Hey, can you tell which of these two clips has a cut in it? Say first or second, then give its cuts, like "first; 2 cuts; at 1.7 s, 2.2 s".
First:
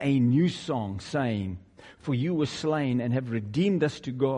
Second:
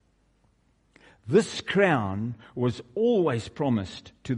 first; 1 cut; at 2.0 s